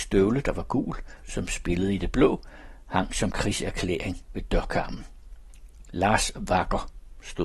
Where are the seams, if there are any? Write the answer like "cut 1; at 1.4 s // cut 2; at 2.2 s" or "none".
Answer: cut 1; at 1.2 s